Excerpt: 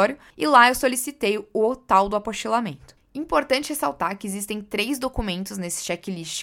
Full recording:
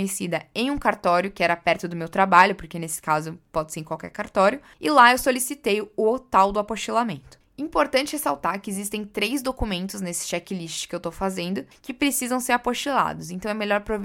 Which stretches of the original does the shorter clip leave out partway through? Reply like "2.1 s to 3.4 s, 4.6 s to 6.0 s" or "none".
none